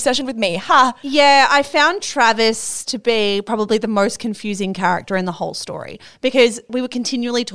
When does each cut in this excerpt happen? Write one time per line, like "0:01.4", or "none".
none